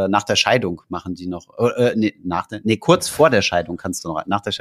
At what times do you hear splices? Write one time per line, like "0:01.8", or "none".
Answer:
none